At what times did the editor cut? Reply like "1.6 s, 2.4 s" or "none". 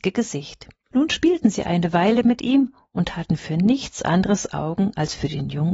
0.9 s